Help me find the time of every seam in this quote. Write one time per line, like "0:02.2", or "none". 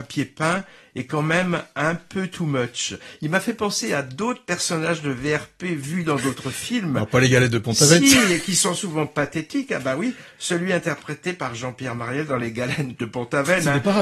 none